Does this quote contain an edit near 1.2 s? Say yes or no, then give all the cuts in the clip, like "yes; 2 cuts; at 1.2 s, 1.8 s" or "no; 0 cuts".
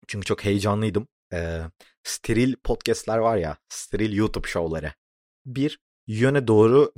yes; 2 cuts; at 1.2 s, 5.3 s